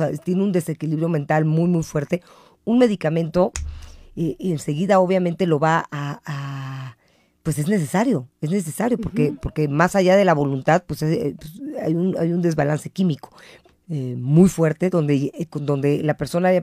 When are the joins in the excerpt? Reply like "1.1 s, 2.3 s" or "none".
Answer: 13.7 s